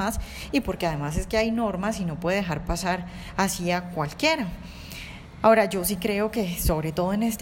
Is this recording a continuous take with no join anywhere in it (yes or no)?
yes